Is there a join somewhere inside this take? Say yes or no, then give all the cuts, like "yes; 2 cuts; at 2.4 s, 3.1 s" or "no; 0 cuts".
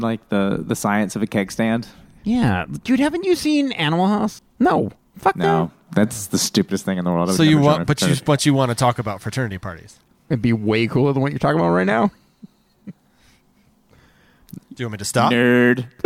yes; 1 cut; at 4.4 s